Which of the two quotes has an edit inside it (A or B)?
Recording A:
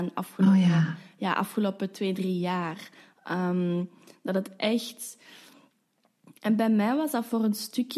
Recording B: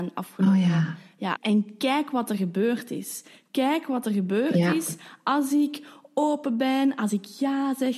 B